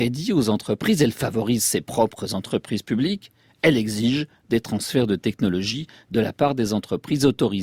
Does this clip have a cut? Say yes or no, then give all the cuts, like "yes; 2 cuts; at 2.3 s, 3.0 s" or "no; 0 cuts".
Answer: no; 0 cuts